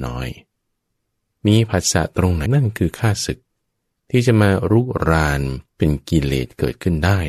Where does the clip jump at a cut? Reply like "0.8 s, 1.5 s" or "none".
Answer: 2.5 s, 5.7 s